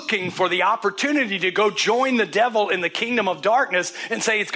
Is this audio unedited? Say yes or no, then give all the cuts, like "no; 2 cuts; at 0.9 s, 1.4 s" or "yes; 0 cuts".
yes; 0 cuts